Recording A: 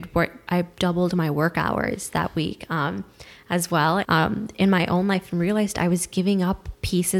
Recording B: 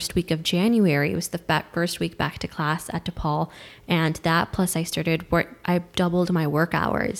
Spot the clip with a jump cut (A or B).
A